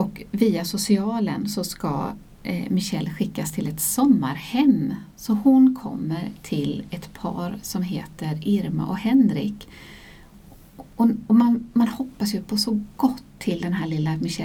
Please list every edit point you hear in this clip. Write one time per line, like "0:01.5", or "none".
none